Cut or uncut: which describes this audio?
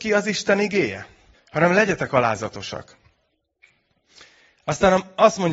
cut